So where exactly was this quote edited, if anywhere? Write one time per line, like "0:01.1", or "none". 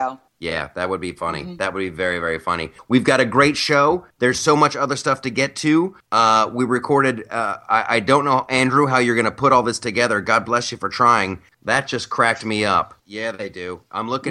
0:11.5
0:13.0